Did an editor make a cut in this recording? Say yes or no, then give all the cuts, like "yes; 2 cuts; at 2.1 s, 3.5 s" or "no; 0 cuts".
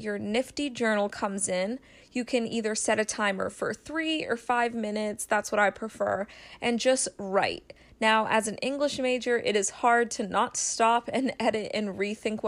no; 0 cuts